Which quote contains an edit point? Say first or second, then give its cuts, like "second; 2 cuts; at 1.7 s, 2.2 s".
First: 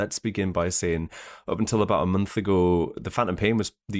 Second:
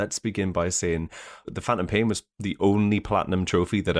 second; 1 cut; at 1.4 s